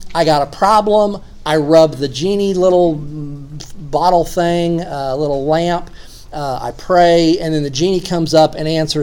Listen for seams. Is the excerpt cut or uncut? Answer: uncut